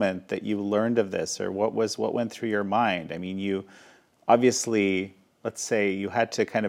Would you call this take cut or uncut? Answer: uncut